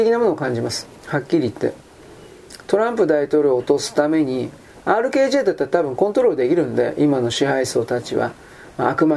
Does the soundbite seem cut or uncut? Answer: cut